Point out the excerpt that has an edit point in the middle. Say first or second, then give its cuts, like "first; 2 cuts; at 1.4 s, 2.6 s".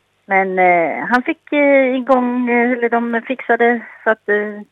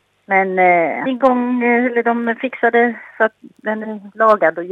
second; 2 cuts; at 1.1 s, 3.4 s